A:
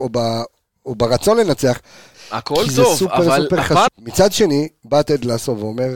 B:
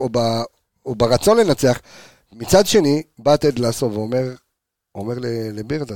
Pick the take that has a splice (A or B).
A